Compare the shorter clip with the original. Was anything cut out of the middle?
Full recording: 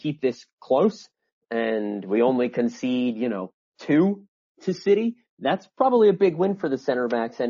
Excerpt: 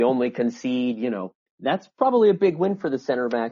yes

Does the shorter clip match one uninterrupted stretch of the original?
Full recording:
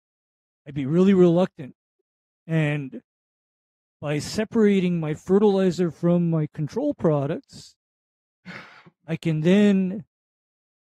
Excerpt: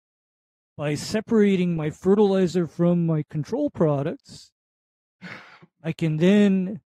yes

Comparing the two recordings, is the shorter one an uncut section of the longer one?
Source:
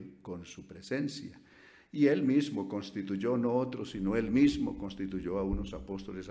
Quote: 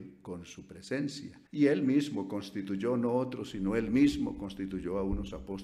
no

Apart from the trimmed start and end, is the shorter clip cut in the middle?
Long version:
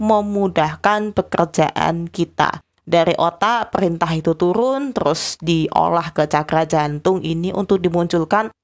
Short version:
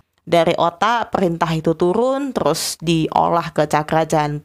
no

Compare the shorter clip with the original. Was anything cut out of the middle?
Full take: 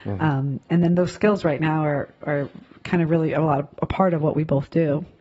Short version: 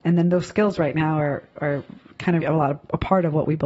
yes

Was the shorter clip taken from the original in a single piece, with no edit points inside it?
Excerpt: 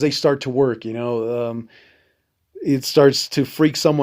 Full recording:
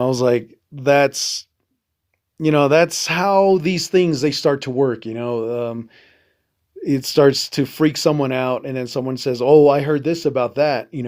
yes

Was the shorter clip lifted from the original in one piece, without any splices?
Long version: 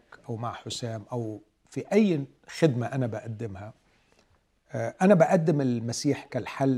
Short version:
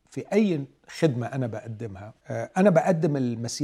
no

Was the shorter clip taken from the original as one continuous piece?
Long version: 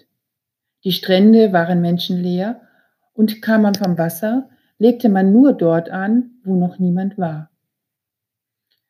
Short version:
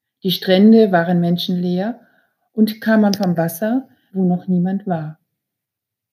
no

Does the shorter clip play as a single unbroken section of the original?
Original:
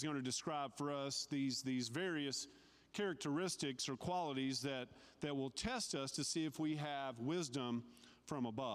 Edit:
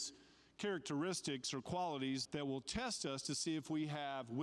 no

